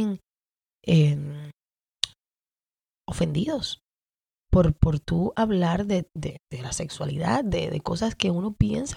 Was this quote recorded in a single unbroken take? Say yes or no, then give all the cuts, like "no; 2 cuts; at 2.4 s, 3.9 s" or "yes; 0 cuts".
yes; 0 cuts